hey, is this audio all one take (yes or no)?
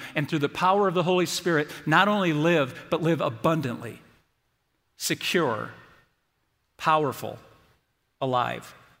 yes